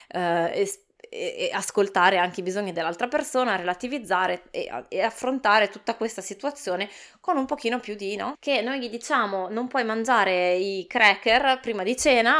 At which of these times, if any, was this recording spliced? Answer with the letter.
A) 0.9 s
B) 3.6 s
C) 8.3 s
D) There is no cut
C